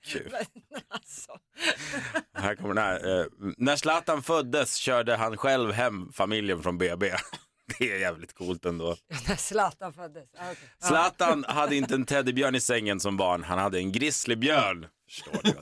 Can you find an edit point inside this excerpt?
no; 0 cuts

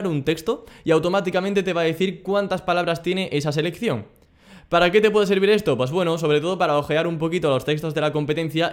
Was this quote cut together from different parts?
no; 0 cuts

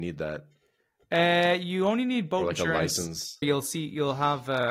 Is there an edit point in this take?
yes; 1 cut; at 3.4 s

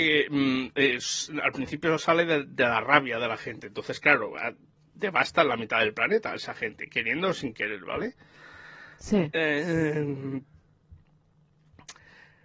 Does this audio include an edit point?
no; 0 cuts

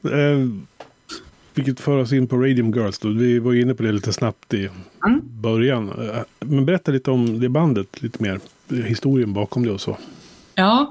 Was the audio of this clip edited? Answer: yes; 1 cut; at 6.4 s

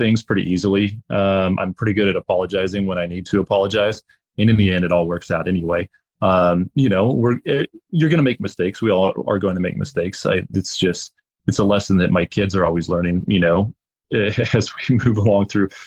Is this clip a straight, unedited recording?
yes; 0 cuts

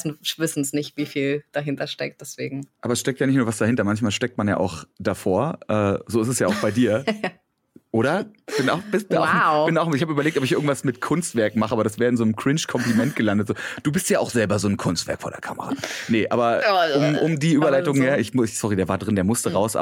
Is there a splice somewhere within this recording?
no; 0 cuts

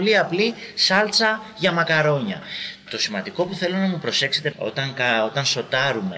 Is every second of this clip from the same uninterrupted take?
no; 1 cut; at 4.5 s

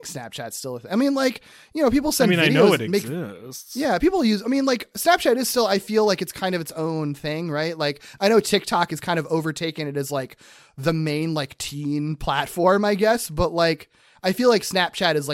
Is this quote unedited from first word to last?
yes; 0 cuts

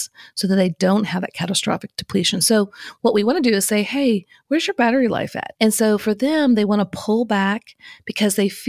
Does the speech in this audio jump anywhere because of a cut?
yes; 1 cut; at 5.6 s

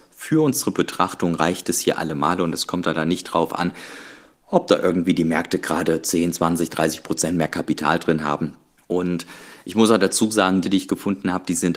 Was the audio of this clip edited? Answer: yes; 2 cuts; at 8.8 s, 10.6 s

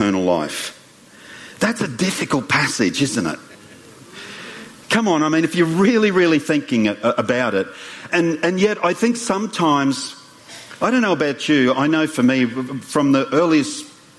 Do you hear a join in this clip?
yes; 1 cut; at 8.1 s

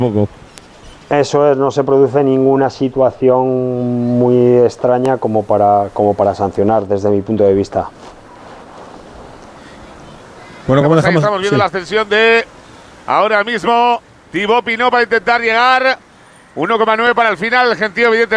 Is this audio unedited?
yes; 0 cuts

